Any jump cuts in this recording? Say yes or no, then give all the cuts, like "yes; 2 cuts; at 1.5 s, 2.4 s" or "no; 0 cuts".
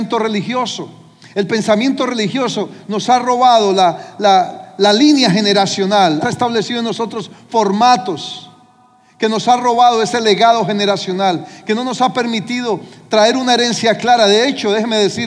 yes; 1 cut; at 6.2 s